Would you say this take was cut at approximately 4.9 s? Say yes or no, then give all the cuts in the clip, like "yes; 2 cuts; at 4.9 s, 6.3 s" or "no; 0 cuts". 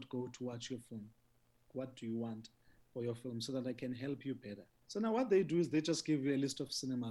yes; 2 cuts; at 1.7 s, 4.9 s